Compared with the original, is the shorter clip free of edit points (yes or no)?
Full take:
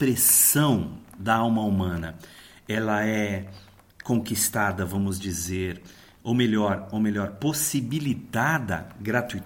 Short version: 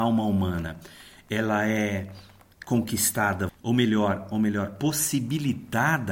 no